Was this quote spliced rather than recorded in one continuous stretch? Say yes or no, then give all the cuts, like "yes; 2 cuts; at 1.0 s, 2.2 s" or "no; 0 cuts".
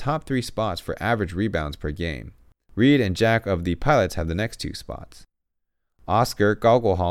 no; 0 cuts